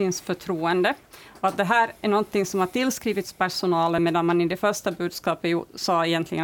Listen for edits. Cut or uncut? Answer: uncut